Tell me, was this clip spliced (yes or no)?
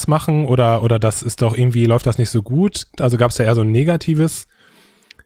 yes